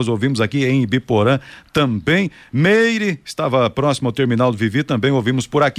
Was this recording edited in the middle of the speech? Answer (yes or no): no